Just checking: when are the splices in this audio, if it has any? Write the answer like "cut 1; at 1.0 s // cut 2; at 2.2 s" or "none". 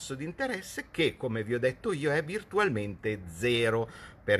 none